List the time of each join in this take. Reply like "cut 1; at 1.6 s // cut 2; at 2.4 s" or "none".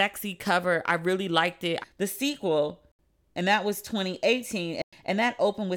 cut 1; at 1.8 s